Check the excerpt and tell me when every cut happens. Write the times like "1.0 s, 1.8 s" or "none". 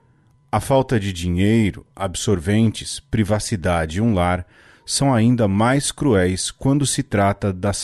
1.9 s